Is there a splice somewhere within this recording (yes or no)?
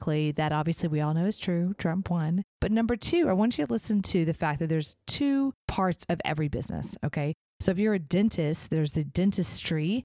yes